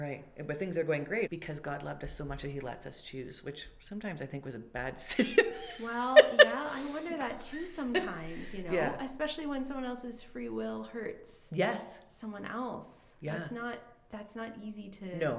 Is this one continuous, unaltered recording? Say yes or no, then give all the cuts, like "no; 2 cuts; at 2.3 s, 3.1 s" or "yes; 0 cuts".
no; 1 cut; at 1.3 s